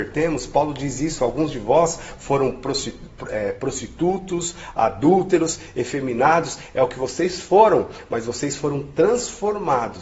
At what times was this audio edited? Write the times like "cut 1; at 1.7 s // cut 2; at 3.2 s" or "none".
none